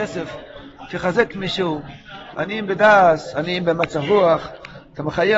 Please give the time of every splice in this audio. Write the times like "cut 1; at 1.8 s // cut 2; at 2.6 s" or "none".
cut 1; at 2.3 s